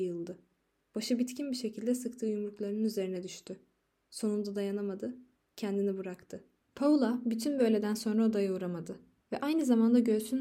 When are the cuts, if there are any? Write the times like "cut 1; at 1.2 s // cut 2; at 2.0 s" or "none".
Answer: cut 1; at 6.6 s // cut 2; at 9.2 s